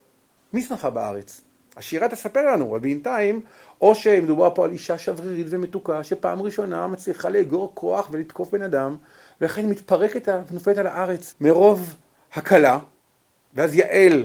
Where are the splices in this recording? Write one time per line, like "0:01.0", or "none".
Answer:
0:01.7
0:11.3